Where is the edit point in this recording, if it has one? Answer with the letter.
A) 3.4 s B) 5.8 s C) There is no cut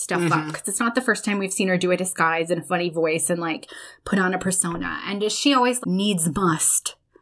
B